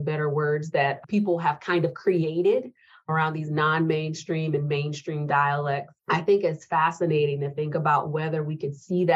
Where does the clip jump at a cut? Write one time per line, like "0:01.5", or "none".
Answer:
0:06.0